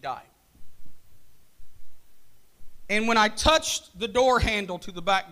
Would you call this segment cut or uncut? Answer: cut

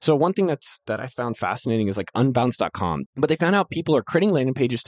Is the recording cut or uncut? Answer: cut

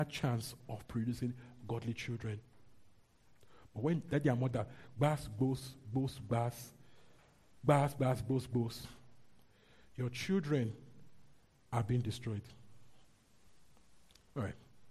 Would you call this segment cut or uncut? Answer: uncut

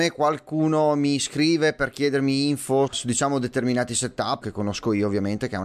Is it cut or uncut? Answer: cut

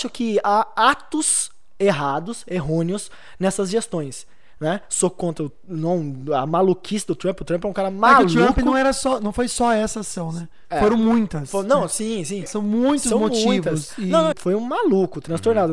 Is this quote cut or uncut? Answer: cut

